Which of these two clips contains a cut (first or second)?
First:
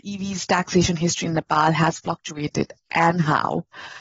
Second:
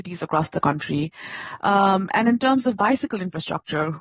second